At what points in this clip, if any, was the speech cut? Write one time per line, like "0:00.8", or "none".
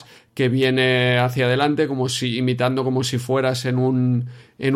none